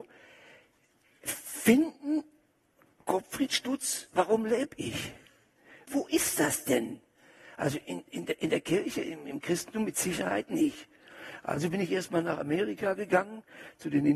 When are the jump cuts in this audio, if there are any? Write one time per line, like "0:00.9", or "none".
0:05.9

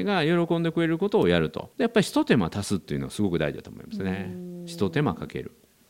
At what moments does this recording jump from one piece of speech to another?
0:01.7

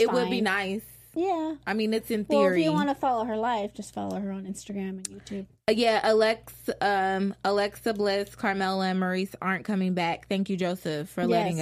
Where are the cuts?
none

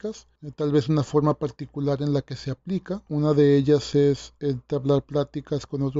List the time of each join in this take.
0:03.1

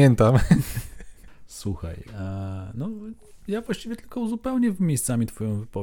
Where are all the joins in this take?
none

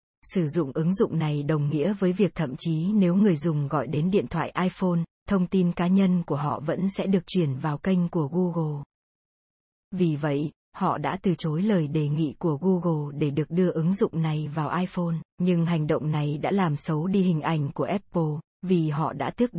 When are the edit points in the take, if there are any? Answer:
0:09.8
0:15.3

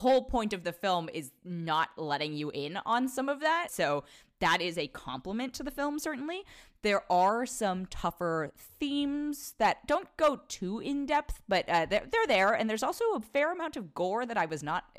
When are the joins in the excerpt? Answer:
0:03.7

